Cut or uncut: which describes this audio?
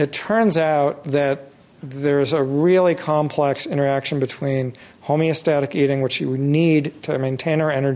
uncut